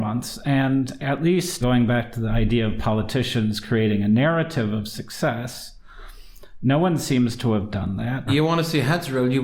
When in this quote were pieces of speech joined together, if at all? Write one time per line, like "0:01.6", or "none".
0:01.6
0:08.3